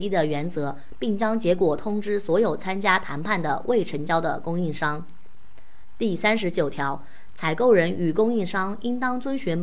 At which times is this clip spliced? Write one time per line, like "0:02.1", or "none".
0:00.9
0:07.3